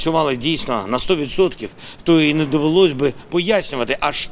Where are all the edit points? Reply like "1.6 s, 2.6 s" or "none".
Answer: none